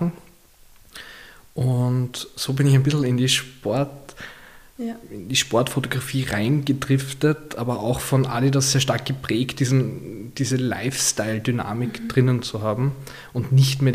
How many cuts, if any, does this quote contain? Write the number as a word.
zero